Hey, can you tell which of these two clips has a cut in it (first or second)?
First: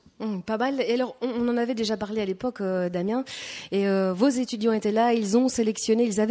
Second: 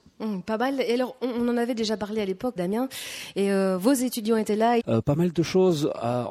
second